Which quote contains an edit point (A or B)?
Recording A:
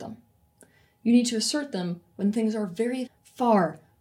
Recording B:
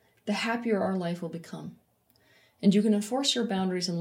A